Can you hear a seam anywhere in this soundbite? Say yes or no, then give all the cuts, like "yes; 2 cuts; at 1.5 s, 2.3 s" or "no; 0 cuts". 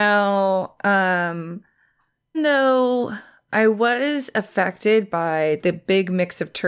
yes; 1 cut; at 2.3 s